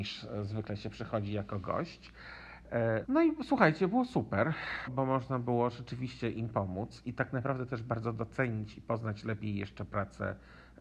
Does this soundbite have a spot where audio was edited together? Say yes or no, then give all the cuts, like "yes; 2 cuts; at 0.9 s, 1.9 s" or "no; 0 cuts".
yes; 2 cuts; at 3.0 s, 4.9 s